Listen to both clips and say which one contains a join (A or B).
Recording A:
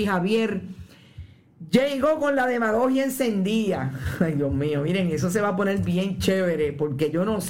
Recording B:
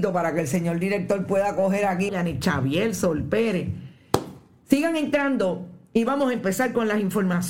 B